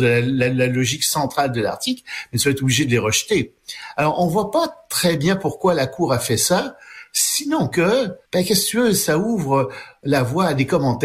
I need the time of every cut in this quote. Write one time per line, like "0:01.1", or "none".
0:08.2

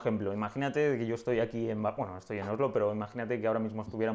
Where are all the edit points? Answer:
none

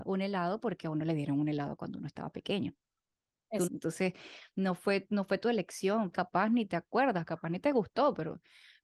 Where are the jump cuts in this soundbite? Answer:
0:03.7
0:06.1

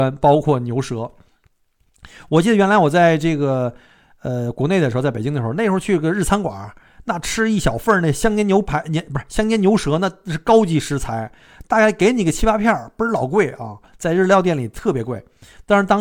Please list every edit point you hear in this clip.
none

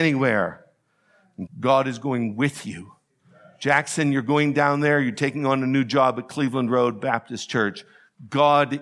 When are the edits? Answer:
0:01.5

